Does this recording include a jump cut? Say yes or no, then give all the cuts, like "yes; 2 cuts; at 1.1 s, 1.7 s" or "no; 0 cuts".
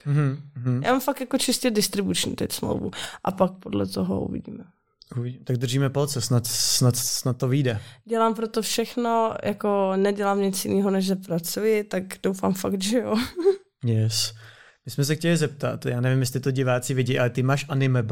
no; 0 cuts